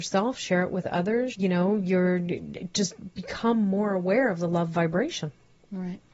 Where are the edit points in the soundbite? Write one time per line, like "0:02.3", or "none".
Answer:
0:01.3

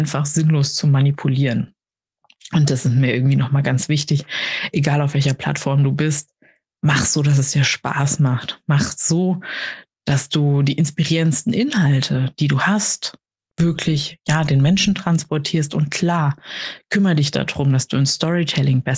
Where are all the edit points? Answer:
none

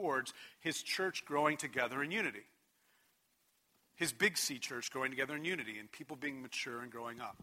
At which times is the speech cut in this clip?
none

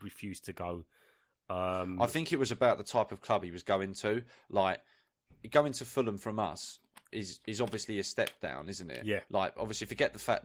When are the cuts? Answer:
none

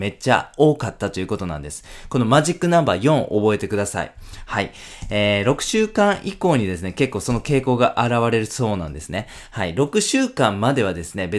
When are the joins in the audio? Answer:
none

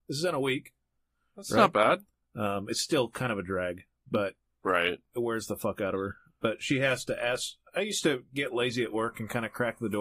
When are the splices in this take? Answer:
0:02.2

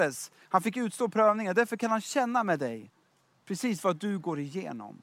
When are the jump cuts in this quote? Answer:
none

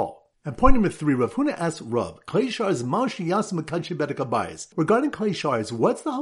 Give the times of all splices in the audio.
0:04.7

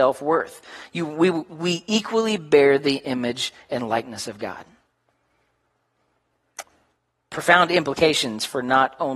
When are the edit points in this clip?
none

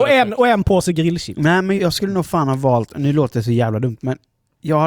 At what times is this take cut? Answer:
0:01.8

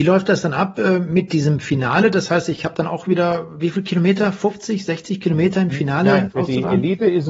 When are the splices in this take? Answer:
none

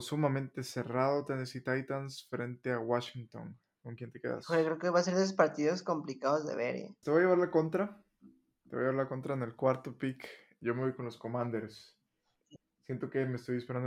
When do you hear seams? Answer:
0:07.0

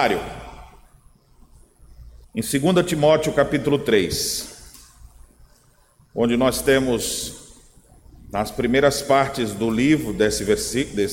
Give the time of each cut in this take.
0:02.2

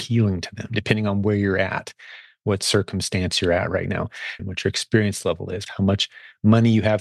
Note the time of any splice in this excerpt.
0:04.4
0:05.7

